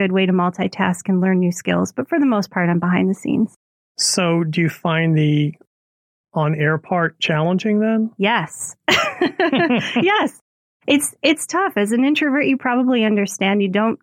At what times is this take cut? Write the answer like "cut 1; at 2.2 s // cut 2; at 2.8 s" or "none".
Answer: none